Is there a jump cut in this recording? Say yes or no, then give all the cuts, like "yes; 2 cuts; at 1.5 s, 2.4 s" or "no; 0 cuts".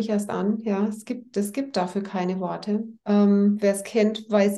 yes; 1 cut; at 3.0 s